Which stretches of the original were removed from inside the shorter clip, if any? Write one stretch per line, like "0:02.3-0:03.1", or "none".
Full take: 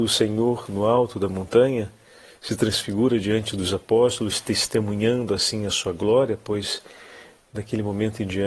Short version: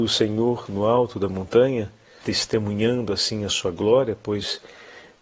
0:02.2-0:04.4